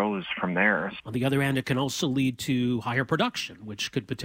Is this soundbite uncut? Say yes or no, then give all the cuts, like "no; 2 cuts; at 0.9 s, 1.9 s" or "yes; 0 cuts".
no; 1 cut; at 1.0 s